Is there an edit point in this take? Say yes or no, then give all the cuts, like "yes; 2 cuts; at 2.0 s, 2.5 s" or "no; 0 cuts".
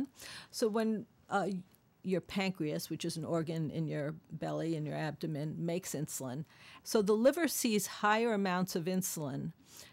yes; 2 cuts; at 2.0 s, 6.8 s